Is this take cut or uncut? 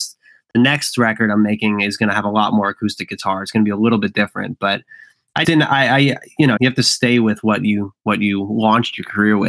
cut